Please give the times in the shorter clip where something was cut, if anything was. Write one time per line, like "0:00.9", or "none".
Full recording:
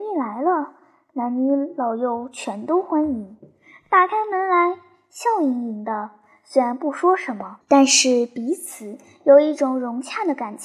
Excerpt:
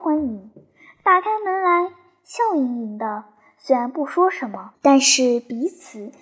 none